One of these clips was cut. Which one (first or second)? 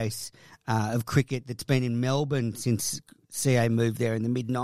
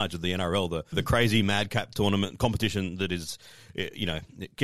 second